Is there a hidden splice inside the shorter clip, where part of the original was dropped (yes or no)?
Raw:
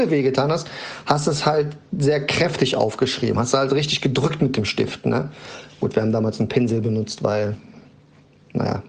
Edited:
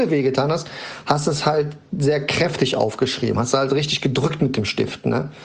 no